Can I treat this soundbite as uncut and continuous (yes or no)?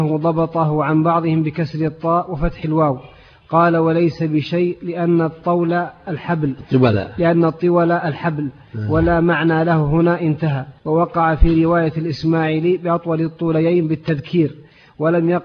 no